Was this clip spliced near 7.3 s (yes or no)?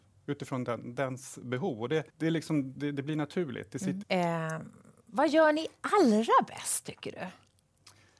no